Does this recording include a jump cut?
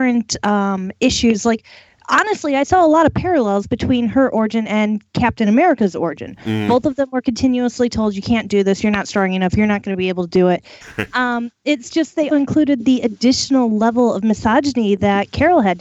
yes; 2 cuts; at 10.8 s, 12.3 s

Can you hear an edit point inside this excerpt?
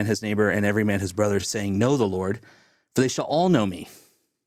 no; 0 cuts

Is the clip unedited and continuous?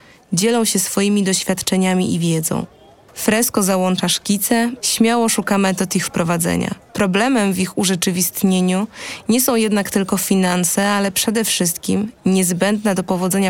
no; 3 cuts; at 3.1 s, 4.8 s, 6.9 s

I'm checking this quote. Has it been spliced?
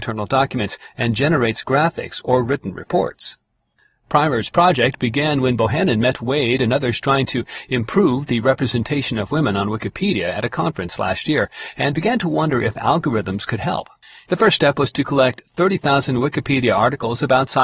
yes; 1 cut; at 14.3 s

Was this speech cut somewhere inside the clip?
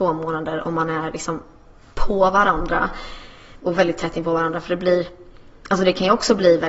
no; 0 cuts

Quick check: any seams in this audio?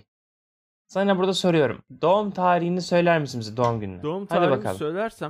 no; 0 cuts

